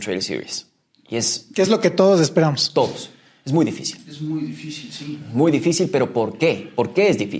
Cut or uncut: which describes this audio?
uncut